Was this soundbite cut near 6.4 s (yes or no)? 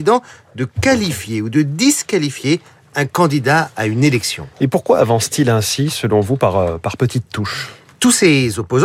no